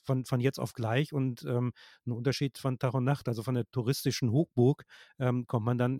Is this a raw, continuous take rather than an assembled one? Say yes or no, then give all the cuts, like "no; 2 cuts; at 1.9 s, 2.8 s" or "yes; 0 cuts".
yes; 0 cuts